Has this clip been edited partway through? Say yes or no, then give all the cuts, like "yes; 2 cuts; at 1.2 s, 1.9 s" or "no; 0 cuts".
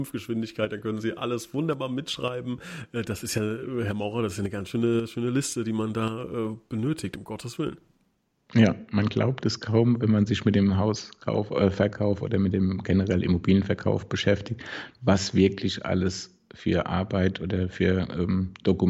no; 0 cuts